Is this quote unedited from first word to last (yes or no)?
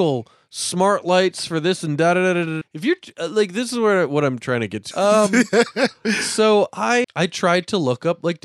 no